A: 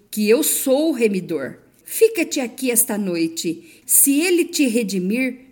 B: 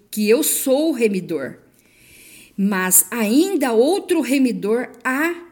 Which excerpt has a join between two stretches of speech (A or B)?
A